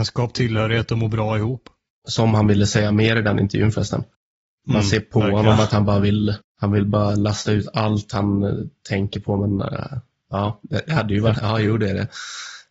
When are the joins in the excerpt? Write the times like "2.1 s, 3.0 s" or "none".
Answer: 11.3 s